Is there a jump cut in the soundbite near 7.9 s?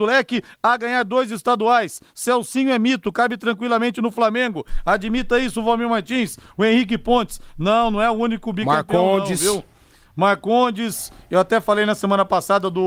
no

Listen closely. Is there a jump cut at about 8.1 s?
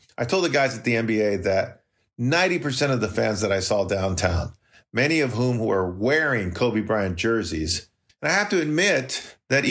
yes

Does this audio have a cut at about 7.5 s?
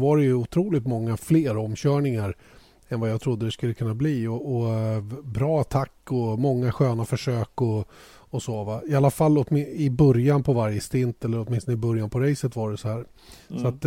no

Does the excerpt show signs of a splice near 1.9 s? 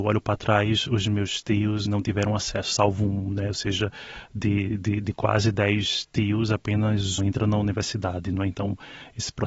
yes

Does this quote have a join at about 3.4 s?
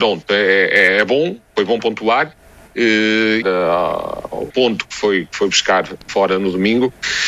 yes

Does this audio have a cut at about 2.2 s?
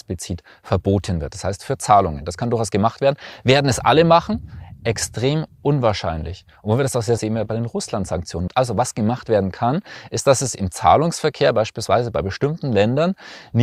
no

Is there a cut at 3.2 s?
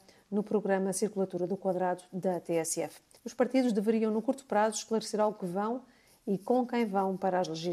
yes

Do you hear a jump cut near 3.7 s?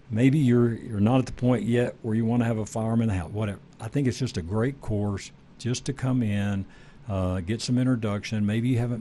no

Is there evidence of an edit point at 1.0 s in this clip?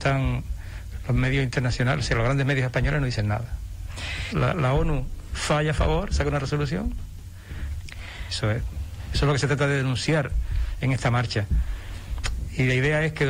no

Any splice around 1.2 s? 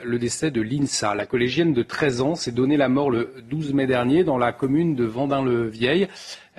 no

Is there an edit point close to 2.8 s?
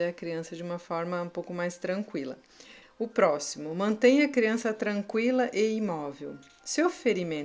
yes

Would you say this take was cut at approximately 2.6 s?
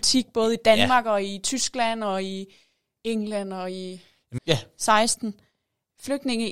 no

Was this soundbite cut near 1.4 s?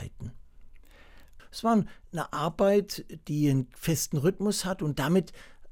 yes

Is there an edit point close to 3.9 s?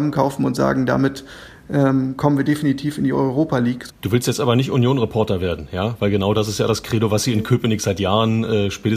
yes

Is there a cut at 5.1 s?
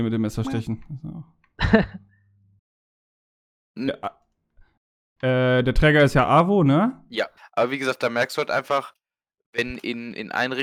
no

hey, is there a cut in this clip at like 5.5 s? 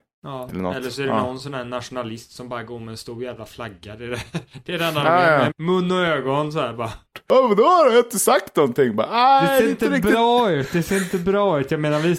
yes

